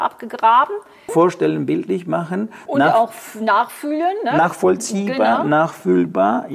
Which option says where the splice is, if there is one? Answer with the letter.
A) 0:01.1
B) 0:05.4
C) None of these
A